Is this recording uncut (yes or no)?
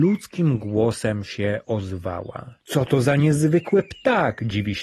no